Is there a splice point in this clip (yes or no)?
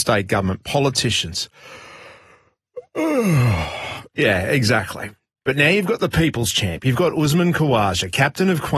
no